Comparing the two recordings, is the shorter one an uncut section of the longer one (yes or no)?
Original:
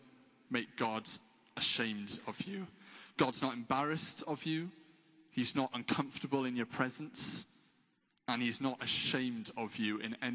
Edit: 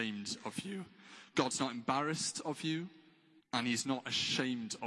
no